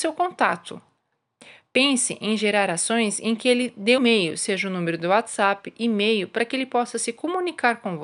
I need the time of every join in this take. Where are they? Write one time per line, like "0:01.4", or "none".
0:04.0